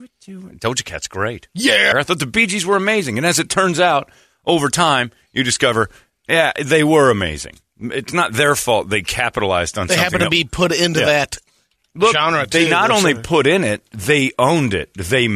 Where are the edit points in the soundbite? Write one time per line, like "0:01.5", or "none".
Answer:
0:01.9